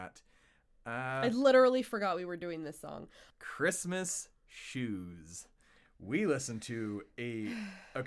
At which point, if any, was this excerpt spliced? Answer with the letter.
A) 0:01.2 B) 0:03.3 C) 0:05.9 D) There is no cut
B